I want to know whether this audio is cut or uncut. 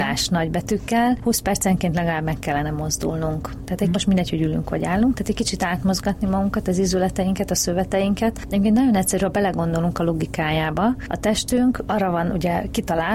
cut